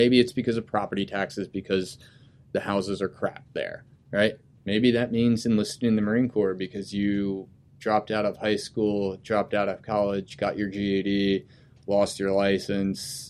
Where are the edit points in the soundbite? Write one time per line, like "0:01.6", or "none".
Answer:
0:04.6